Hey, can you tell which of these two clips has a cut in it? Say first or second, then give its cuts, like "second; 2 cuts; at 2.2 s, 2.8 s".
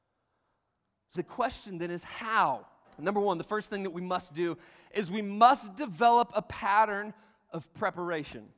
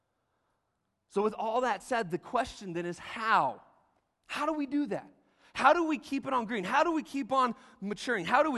first; 2 cuts; at 1.1 s, 2.8 s